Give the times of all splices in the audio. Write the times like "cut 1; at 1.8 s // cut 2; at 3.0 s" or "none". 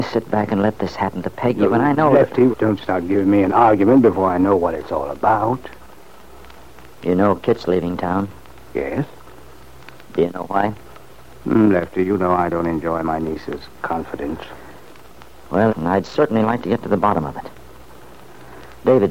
cut 1; at 2.5 s // cut 2; at 15.7 s